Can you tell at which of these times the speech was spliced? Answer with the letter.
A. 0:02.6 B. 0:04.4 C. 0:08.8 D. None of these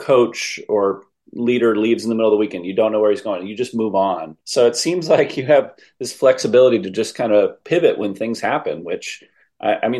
B